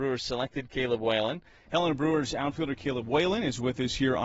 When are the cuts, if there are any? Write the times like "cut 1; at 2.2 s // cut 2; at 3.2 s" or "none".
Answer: cut 1; at 1.7 s

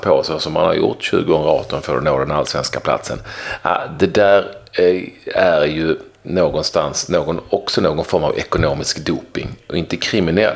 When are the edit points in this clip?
none

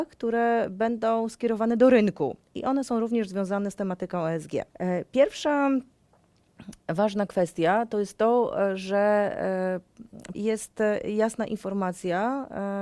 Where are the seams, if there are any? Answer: cut 1; at 4.7 s // cut 2; at 10.3 s

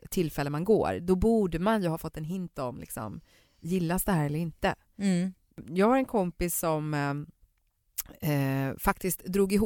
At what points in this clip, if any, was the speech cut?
none

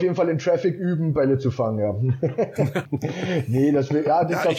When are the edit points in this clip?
cut 1; at 2.9 s

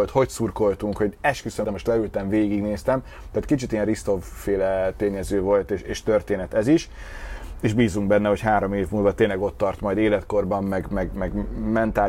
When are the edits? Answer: cut 1; at 1.6 s

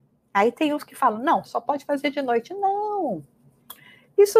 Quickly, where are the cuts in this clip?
cut 1; at 1.4 s

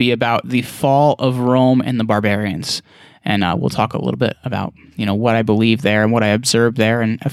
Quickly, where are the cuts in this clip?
none

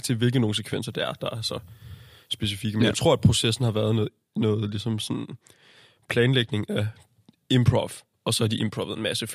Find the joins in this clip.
none

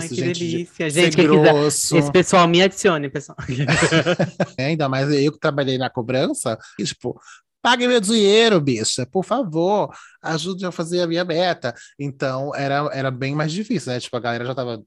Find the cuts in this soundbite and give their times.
cut 1; at 4.6 s // cut 2; at 6.8 s

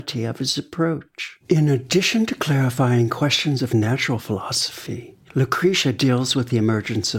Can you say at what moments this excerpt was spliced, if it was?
cut 1; at 1.4 s

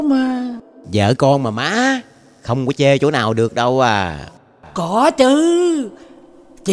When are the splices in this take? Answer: none

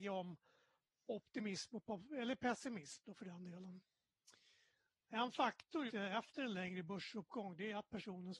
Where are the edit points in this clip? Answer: cut 1; at 5.9 s

